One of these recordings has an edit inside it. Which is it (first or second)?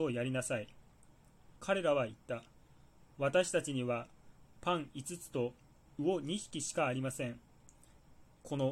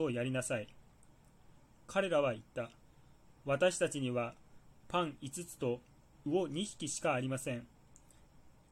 first